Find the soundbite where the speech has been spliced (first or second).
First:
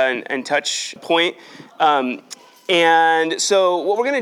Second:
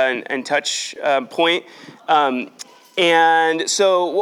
first